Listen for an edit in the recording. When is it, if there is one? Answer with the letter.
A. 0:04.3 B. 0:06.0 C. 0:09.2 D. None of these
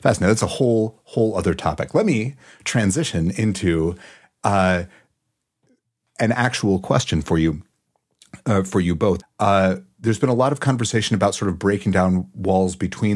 C